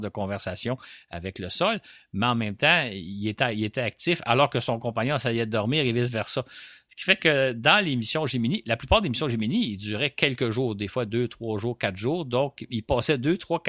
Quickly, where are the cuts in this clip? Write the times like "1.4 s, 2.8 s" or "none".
none